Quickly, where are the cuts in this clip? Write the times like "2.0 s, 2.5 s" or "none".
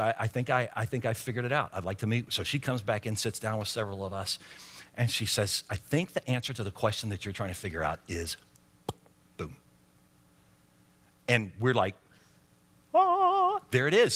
none